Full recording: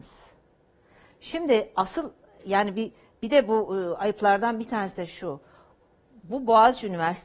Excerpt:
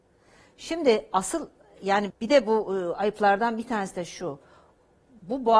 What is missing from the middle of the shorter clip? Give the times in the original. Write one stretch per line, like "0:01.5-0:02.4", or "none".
0:02.7-0:03.1

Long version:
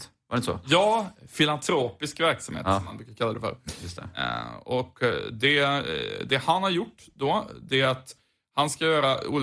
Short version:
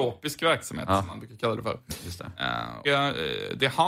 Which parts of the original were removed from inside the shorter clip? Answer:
0:04.6-0:05.5

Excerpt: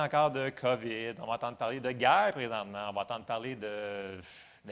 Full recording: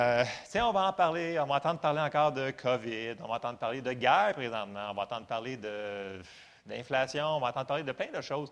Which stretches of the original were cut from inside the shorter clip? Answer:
none

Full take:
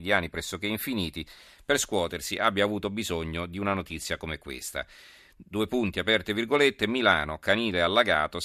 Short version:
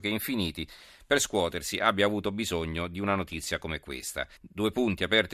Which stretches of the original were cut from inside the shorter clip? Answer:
0:04.9-0:05.3

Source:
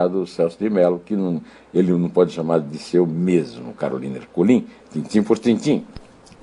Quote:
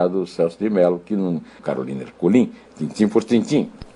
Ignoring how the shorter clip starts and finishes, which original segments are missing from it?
0:01.6-0:03.7

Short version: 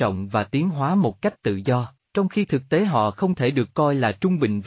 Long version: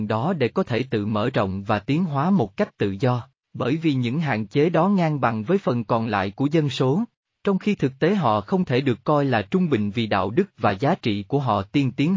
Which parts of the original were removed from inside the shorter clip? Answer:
0:03.3-0:07.3

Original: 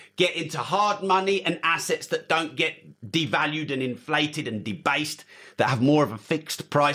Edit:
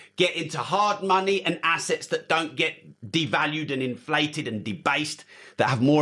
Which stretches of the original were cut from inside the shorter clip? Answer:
none

